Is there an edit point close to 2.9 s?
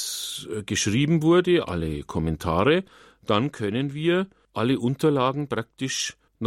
no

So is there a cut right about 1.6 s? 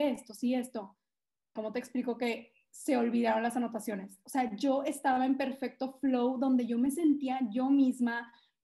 yes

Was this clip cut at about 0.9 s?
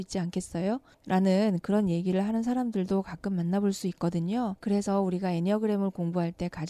yes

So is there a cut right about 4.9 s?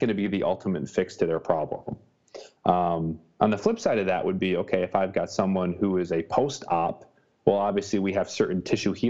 no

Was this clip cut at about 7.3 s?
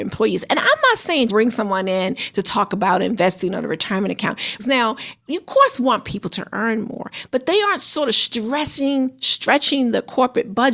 no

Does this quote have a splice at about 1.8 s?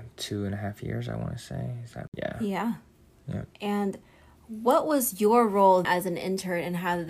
no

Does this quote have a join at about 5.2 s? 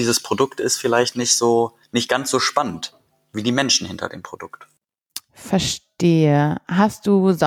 no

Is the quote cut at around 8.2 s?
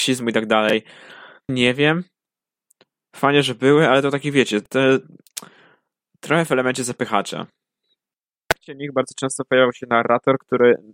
no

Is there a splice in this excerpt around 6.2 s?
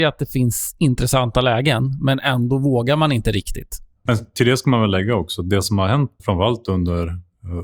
yes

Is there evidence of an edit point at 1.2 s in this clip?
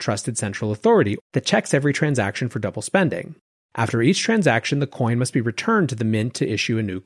yes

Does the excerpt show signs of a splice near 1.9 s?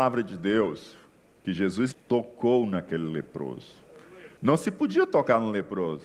yes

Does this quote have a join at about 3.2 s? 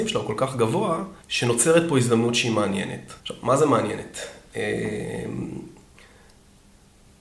yes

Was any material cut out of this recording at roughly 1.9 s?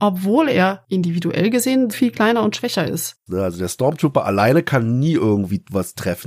yes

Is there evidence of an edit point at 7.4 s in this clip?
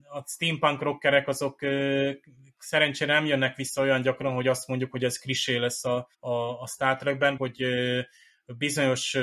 yes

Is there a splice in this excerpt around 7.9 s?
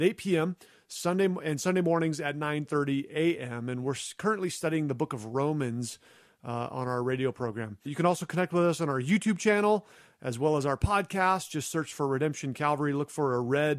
yes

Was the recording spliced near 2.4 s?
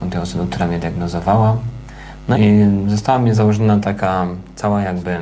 yes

